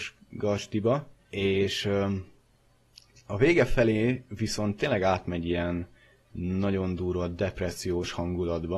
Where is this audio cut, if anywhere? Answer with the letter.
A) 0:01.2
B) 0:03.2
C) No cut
A